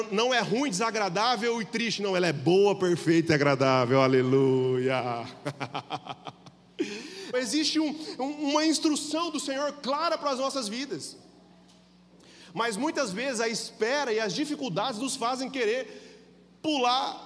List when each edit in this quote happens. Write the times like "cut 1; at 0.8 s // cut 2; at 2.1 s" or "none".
cut 1; at 7.3 s